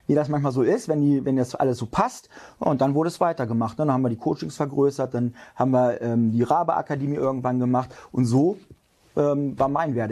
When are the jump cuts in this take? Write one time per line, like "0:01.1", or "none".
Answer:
none